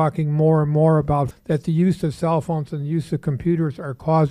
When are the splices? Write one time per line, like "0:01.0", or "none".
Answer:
0:01.3